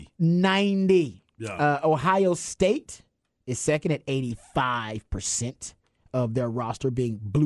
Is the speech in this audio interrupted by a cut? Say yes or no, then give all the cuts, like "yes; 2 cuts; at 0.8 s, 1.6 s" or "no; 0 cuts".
no; 0 cuts